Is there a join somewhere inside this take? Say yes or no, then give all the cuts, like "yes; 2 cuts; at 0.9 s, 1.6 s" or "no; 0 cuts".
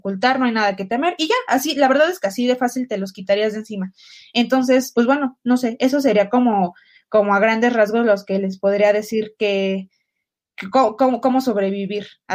yes; 1 cut; at 4.9 s